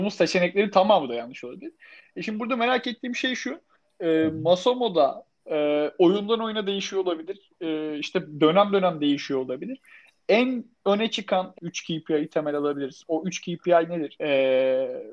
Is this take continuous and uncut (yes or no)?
no